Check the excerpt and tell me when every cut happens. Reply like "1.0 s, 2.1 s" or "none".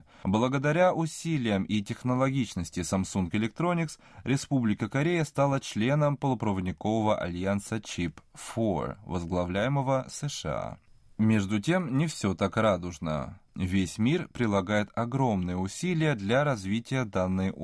13.5 s